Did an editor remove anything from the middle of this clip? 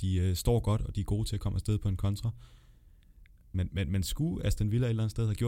yes; 1 cut; at 3.5 s

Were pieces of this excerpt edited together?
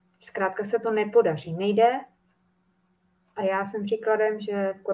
no; 0 cuts

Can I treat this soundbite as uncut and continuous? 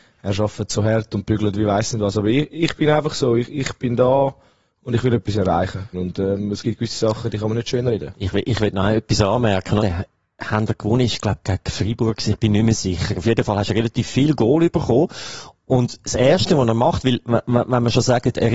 no; 2 cuts; at 5.9 s, 9.8 s

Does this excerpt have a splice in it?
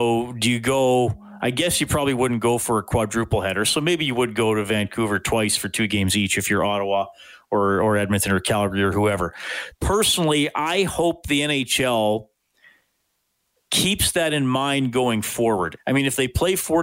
yes; 2 cuts; at 9.7 s, 15.8 s

